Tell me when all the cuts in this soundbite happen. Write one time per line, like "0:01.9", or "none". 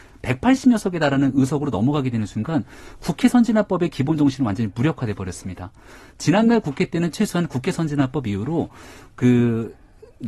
none

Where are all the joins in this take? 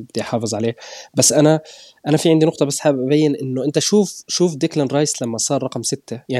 none

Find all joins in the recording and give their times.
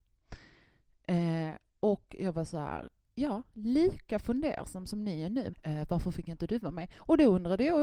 0:05.5

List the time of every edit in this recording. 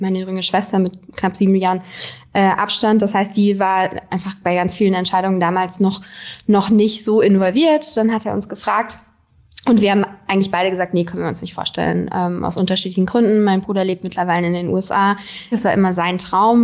0:15.5

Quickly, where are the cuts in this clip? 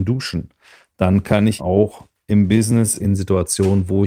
0:01.6
0:03.0

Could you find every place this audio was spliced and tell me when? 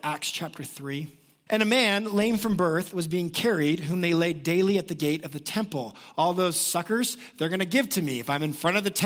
0:01.5

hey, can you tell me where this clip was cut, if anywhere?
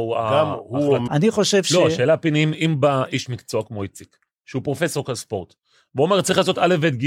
0:01.1

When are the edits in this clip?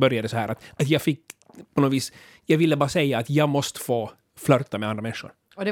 none

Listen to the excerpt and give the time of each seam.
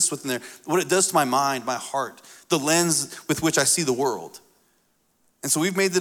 none

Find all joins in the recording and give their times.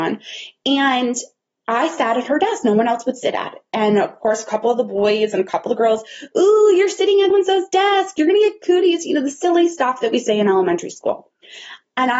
0:07.3

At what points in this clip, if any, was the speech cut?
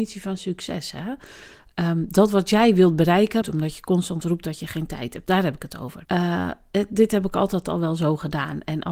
0:03.4
0:06.0

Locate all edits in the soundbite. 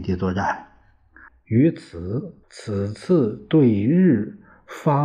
0:01.3
0:02.4

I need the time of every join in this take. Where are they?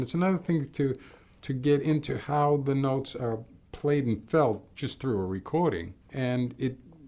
0:06.0

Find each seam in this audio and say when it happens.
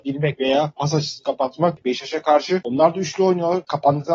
0:01.8

